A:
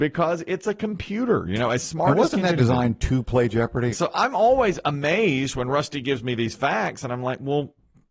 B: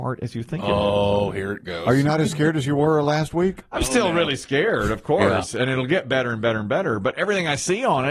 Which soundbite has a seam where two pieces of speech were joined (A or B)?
A